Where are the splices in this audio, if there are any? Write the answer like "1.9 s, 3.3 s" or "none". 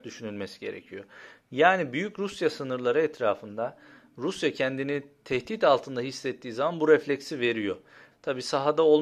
8.1 s